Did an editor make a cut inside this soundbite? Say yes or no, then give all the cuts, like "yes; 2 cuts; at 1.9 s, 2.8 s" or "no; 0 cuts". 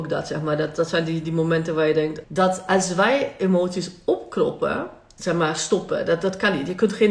yes; 2 cuts; at 2.2 s, 5.2 s